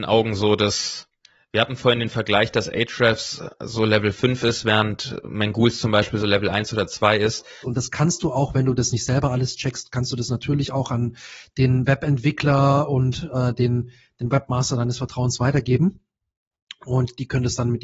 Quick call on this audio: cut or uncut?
cut